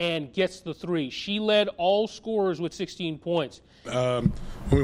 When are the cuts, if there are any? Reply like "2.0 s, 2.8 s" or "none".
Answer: 3.9 s